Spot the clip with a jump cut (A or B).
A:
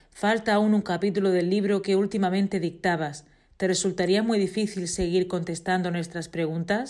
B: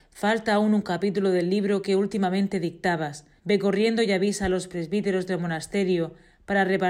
B